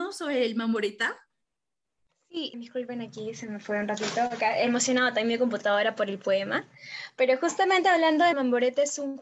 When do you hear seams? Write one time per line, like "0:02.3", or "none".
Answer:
0:02.5
0:08.3